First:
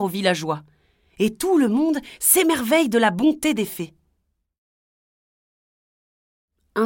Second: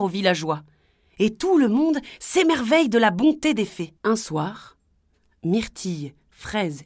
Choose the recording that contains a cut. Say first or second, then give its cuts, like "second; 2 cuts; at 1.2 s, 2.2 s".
second; 1 cut; at 4.0 s